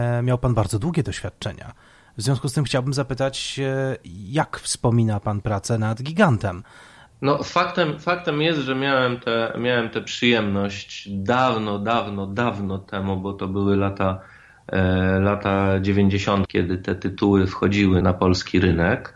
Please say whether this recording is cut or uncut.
cut